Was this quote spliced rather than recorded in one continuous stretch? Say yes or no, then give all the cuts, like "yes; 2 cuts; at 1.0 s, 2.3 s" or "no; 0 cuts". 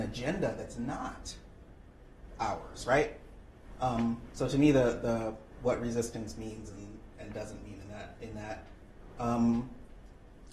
no; 0 cuts